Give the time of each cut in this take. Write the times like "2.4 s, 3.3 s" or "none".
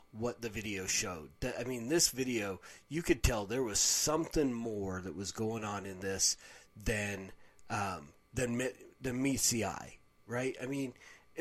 none